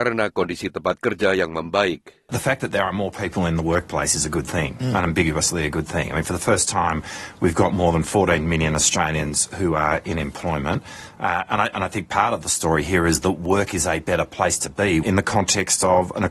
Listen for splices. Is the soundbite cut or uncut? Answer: cut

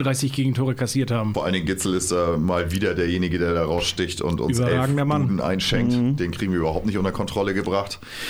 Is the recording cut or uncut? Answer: uncut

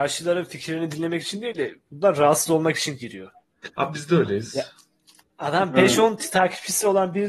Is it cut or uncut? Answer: cut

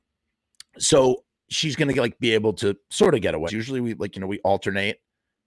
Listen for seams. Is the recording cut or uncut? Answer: cut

